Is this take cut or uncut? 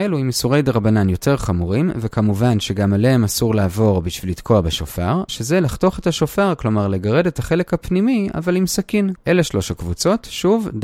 cut